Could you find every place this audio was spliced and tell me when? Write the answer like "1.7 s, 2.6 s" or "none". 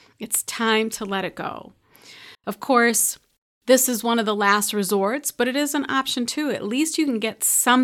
2.3 s